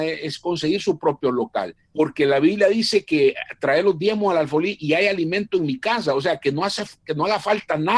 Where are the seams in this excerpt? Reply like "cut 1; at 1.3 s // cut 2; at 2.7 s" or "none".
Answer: cut 1; at 1.9 s